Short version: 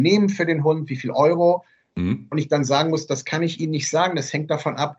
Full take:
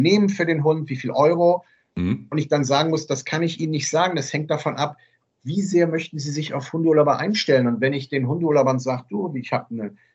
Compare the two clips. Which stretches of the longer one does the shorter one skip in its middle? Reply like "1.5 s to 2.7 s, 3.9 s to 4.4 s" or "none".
none